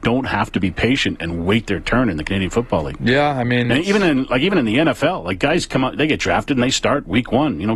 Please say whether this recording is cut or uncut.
uncut